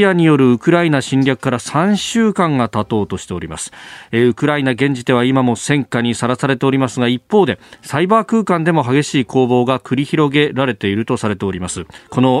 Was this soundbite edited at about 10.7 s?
no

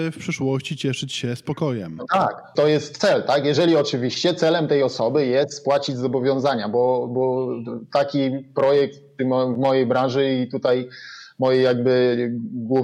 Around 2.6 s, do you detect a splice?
yes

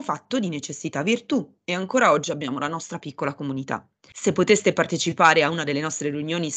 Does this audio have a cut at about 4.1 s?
yes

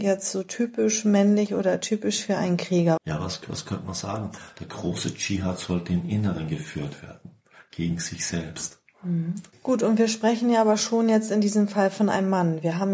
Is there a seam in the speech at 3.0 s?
yes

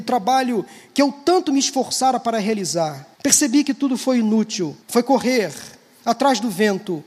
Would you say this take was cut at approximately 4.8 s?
yes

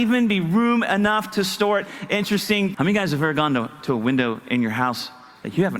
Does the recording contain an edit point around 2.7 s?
yes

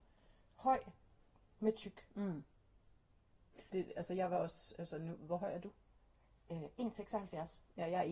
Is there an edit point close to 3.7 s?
yes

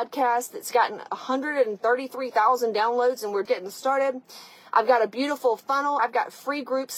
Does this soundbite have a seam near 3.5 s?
yes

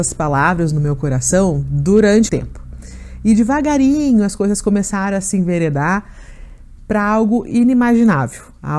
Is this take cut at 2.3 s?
yes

